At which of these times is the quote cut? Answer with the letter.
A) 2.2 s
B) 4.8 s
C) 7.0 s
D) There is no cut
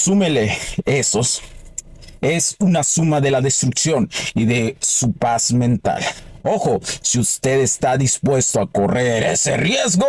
D